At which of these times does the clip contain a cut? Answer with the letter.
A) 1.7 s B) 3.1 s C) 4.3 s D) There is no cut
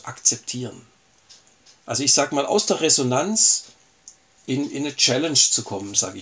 A